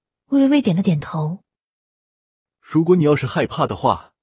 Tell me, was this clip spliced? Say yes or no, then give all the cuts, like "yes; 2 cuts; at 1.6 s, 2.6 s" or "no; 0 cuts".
no; 0 cuts